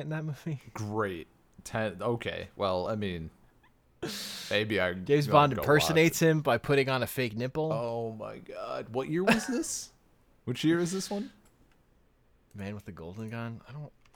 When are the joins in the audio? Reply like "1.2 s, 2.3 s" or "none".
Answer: none